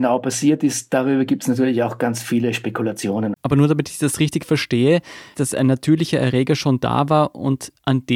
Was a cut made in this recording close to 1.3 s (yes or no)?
no